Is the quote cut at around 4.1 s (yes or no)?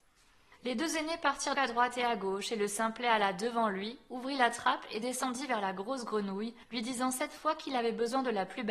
no